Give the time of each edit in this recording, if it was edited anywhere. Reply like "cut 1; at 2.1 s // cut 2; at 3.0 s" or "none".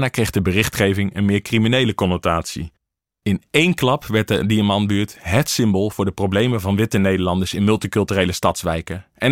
cut 1; at 3.1 s